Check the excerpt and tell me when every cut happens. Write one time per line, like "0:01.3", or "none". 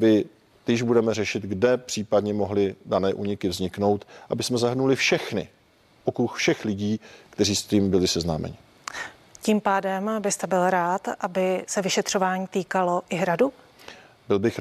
none